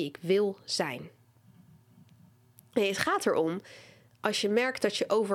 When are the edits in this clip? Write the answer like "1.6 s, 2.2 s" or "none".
2.7 s